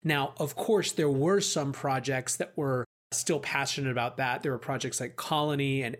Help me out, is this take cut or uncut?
uncut